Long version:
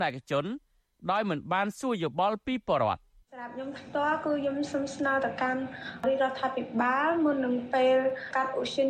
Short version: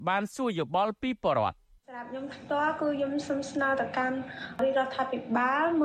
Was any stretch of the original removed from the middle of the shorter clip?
no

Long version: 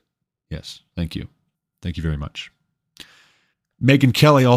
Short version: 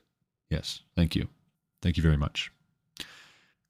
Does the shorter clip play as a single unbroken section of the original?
yes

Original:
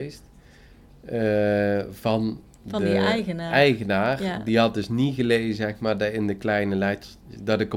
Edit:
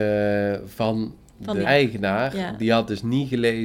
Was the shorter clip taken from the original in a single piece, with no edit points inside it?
no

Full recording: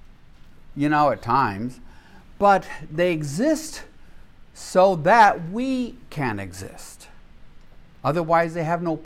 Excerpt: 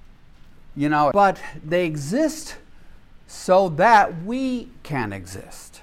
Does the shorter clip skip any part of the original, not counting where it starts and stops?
yes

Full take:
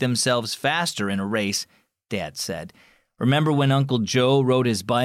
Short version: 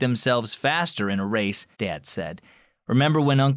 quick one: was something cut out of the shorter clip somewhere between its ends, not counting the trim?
yes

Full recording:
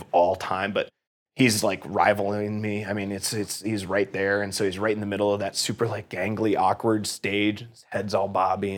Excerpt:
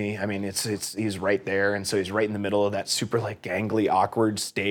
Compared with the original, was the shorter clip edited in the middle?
no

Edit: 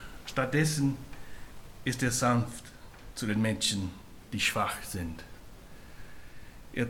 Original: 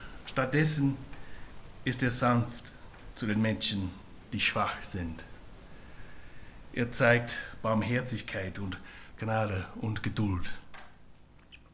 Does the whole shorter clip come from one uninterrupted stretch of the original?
yes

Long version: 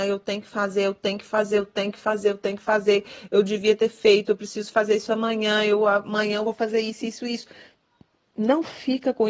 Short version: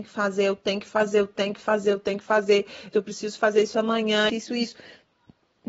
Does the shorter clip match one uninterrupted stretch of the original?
no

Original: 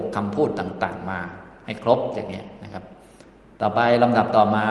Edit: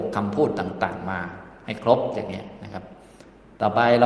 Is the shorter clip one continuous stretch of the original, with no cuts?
yes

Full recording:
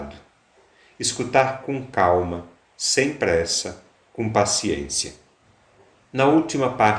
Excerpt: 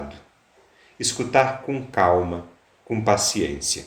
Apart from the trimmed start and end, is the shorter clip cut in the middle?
yes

